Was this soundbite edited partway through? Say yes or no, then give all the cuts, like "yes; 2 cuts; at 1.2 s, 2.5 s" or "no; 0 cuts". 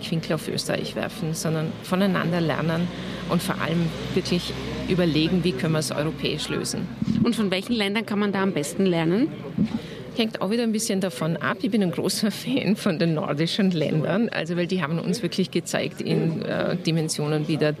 no; 0 cuts